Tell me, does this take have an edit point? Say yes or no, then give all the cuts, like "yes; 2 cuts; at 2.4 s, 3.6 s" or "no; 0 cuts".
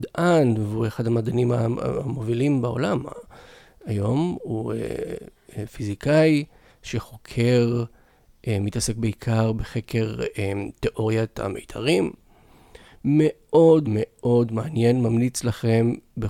yes; 1 cut; at 13.8 s